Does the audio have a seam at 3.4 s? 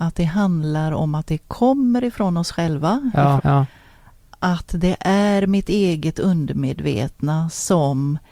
yes; 1 cut; at 3.4 s

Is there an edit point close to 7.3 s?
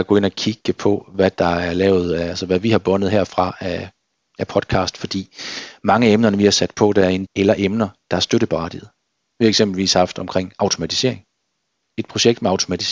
yes; 1 cut; at 7.3 s

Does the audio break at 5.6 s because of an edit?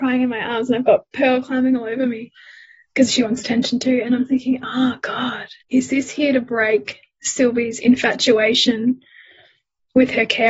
yes; 1 cut; at 5.6 s

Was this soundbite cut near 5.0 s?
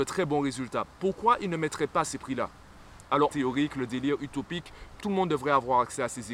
yes; 2 cuts; at 3.3 s, 5.0 s

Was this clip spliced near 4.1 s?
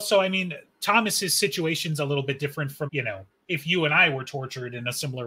no; 1 cut; at 2.9 s

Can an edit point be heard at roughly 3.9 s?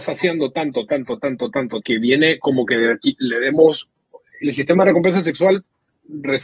no; 1 cut; at 1.8 s

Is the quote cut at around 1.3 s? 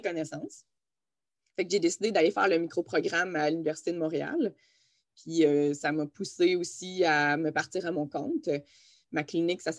no; 0 cuts

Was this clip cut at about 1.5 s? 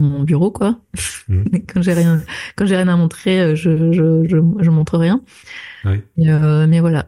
no; 0 cuts

